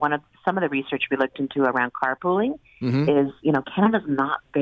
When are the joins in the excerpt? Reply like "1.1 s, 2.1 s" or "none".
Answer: none